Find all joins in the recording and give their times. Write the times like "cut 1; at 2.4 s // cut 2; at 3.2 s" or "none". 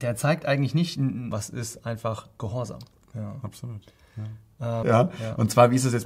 cut 1; at 1.3 s // cut 2; at 3.1 s // cut 3; at 4.8 s